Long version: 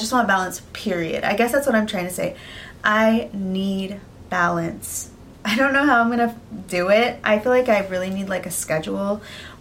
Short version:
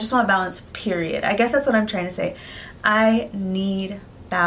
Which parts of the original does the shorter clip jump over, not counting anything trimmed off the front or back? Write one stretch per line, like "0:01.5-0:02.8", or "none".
none